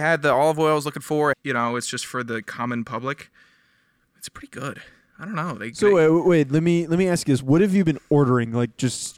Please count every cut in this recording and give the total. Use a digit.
1